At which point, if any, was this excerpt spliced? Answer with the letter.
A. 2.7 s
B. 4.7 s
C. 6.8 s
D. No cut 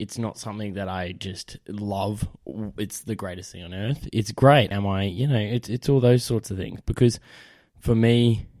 B